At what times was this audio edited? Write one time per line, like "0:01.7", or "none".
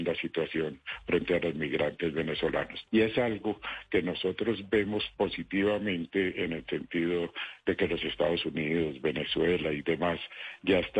0:02.9